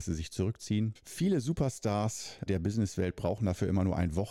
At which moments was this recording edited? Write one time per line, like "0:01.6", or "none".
0:01.0
0:02.5